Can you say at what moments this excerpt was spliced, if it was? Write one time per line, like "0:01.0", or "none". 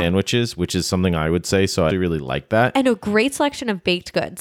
0:01.9